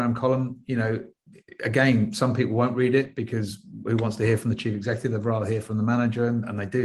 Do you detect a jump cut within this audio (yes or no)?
no